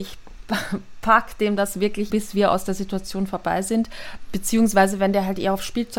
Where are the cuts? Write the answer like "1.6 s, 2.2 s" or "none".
2.1 s